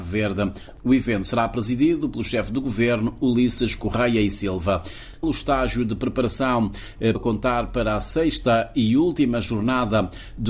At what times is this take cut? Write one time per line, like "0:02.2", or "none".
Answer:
0:05.2
0:07.1